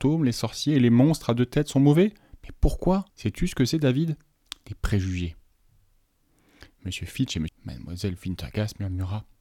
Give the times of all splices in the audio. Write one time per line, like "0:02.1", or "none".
0:03.1
0:07.5